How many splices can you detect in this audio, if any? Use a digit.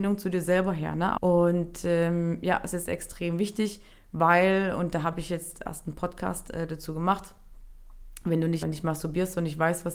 2